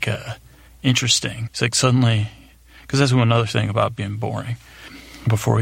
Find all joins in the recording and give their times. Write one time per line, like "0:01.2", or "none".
none